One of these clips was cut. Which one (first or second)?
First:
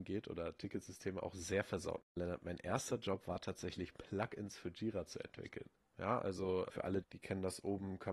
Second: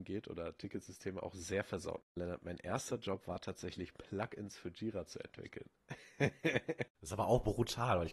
first